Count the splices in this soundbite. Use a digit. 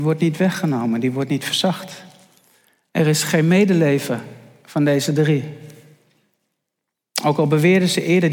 0